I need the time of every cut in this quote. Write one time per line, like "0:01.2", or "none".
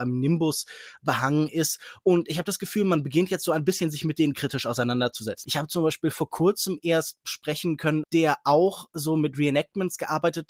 0:05.4
0:08.0

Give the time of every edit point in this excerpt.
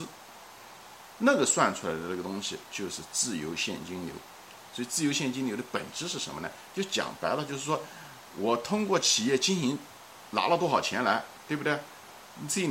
none

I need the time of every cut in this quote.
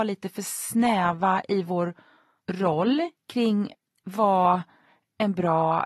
none

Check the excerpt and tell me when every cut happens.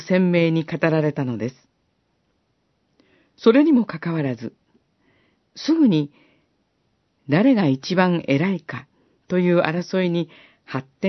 none

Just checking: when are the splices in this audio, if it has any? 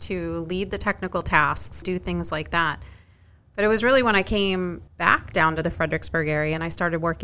0:01.8
0:04.9

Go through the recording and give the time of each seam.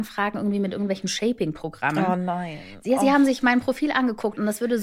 none

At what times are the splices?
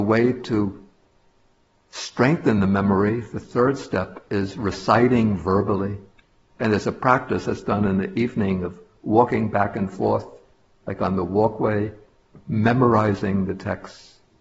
0:06.5

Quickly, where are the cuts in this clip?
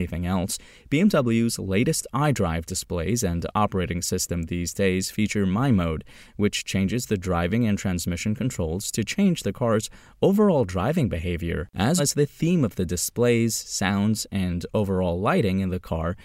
0:12.0

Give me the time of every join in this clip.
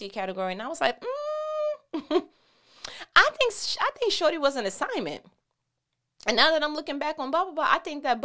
none

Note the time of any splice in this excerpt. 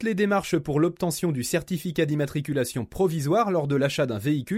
none

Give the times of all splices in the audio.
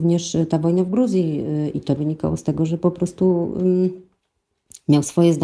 0:02.0

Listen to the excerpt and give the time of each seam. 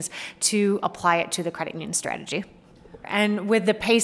0:03.0

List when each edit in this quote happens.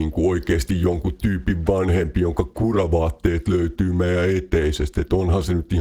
none

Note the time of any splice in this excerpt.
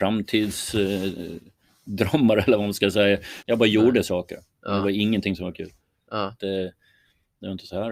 0:03.4
0:06.4

